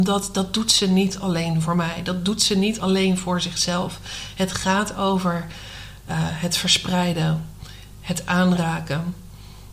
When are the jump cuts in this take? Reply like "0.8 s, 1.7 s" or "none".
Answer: none